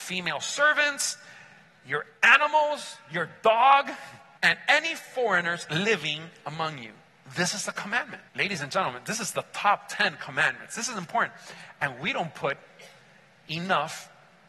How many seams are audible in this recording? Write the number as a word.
two